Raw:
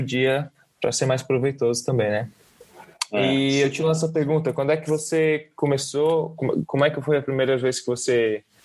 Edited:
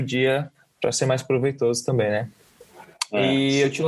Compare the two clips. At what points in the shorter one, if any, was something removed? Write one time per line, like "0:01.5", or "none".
none

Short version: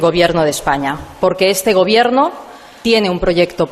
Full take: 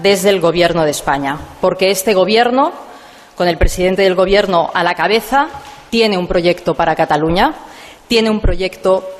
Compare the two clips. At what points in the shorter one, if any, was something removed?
0:02.8

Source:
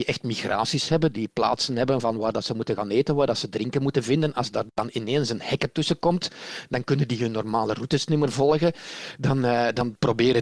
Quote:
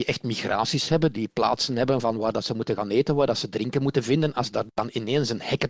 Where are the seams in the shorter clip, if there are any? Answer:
none

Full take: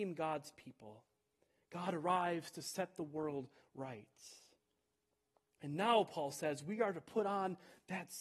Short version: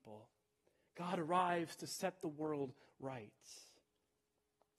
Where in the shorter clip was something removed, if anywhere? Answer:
none

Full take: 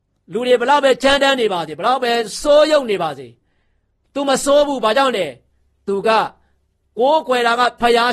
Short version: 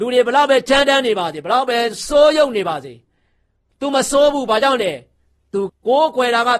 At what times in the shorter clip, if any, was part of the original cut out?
0:05.7

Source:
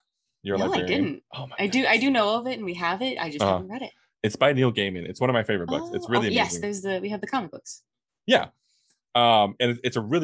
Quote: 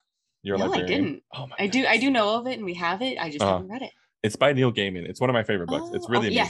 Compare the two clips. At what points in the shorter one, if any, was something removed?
none

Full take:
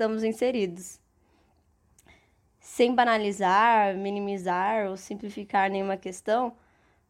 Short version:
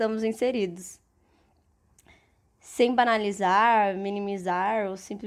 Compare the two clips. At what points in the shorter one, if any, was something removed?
none

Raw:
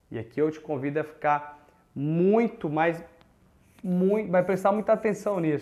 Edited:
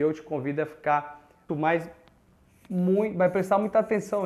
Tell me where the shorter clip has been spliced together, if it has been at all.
0:01.5

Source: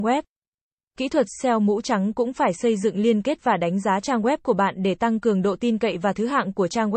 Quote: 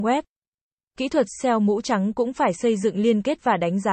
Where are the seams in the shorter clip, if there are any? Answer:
none

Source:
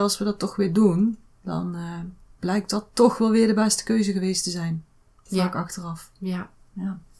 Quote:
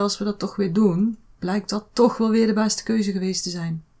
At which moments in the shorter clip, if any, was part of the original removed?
0:01.3

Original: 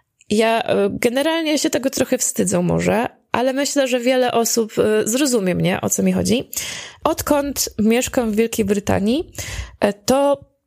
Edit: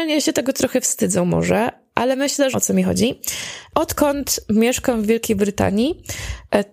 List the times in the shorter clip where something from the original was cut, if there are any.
0:02.5

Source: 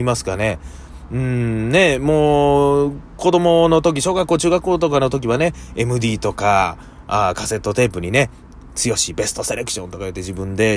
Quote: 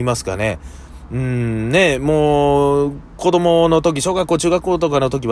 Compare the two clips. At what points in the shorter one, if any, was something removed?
none

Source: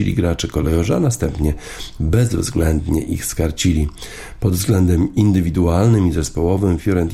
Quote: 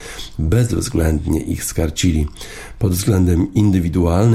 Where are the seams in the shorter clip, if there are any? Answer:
none

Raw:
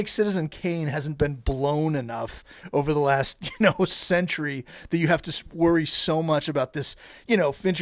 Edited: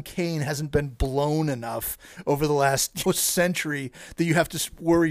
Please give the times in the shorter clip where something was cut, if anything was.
0:03.0

